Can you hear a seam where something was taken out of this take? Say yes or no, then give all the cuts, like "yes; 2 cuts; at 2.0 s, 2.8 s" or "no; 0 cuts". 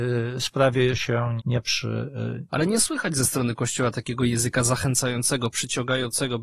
yes; 2 cuts; at 1.4 s, 2.5 s